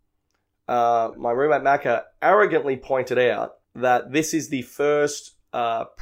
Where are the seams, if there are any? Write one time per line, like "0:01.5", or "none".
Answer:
0:01.1
0:03.6